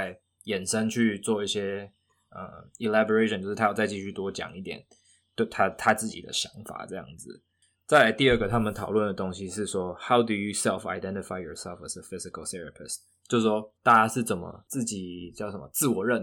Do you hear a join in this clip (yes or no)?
yes